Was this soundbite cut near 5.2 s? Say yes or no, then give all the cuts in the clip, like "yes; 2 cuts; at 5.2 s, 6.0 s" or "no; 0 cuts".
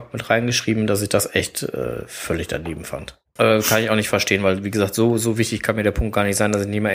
no; 1 cut; at 3.4 s